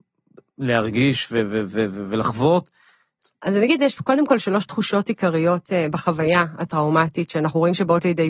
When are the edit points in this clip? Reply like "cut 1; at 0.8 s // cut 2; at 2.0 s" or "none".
none